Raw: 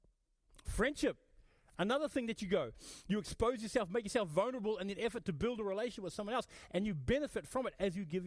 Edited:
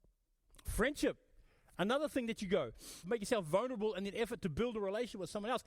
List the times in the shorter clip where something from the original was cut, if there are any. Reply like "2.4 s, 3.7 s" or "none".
3.0 s